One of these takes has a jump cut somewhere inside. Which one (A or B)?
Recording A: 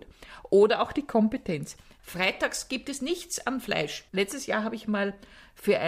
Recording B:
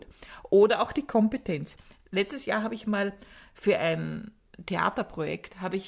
A